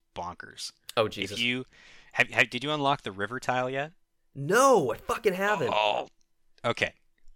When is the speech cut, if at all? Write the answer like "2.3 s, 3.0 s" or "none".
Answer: none